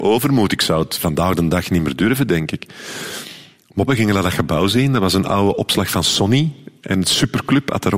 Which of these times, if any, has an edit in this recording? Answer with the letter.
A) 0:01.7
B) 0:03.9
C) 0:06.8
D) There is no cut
B